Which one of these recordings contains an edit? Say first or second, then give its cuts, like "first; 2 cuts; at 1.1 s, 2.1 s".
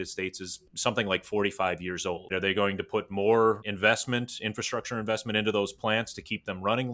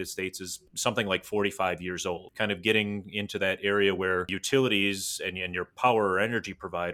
first; 1 cut; at 2.3 s